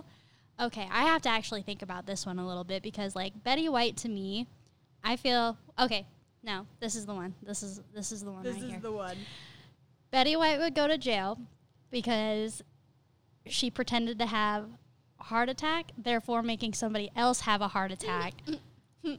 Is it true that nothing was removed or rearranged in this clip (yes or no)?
yes